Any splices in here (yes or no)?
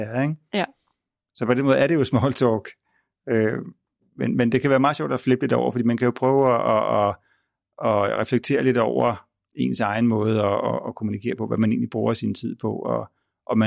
no